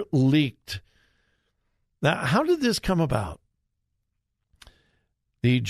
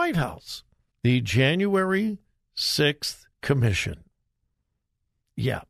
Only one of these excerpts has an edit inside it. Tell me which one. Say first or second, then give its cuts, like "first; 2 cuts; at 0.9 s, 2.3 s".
second; 2 cuts; at 0.9 s, 3.3 s